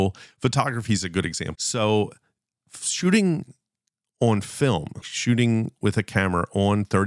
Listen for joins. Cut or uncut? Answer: cut